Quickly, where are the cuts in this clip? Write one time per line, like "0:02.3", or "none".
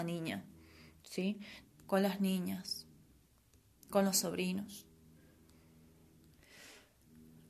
0:01.6